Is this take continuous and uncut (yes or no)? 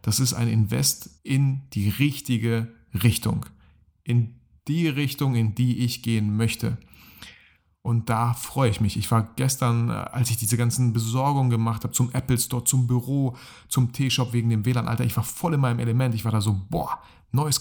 no